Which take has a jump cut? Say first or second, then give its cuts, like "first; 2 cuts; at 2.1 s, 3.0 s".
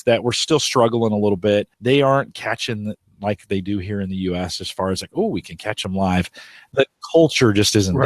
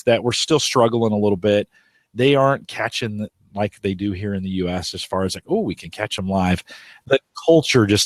first; 1 cut; at 1.7 s